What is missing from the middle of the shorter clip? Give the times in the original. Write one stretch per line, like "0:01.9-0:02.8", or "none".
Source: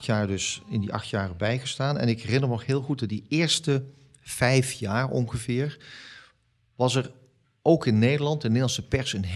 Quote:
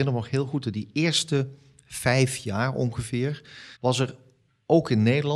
0:06.1-0:06.7